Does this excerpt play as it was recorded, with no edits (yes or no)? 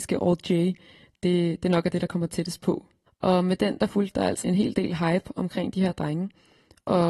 no